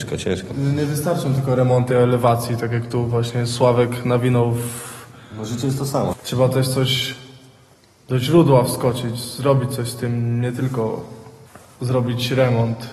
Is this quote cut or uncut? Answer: cut